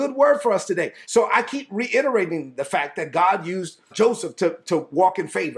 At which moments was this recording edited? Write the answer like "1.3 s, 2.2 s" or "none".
1.0 s, 3.9 s